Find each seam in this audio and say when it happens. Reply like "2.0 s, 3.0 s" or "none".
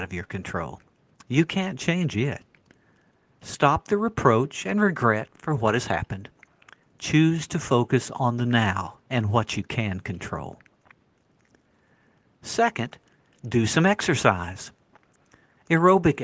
none